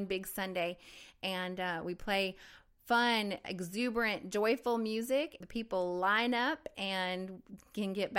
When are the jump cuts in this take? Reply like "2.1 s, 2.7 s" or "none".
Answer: 5.4 s